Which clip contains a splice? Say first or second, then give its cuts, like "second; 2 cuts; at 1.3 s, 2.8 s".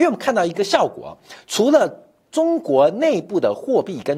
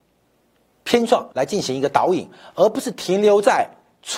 second; 1 cut; at 1.3 s